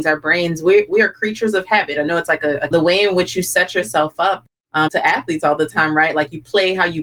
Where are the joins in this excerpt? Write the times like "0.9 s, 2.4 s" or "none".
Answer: 2.7 s, 4.9 s